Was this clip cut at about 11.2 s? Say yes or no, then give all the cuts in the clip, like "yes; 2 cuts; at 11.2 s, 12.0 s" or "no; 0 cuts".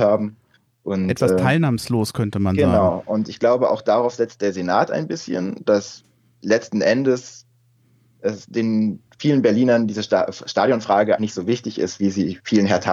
yes; 1 cut; at 11.2 s